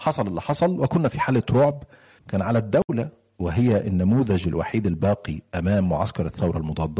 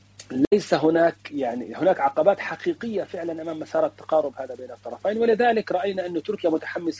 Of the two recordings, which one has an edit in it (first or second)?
first